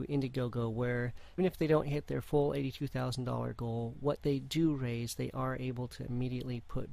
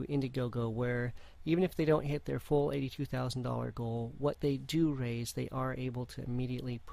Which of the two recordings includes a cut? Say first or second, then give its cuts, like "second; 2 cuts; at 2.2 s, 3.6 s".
first; 1 cut; at 1.4 s